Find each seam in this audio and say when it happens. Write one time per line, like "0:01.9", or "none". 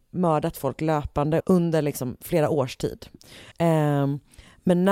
0:01.4
0:03.5